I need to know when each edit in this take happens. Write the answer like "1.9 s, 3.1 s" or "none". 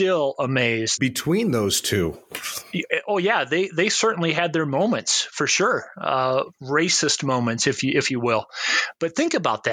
1.0 s